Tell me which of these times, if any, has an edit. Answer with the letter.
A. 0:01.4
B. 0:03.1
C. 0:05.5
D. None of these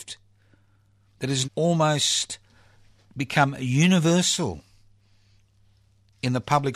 A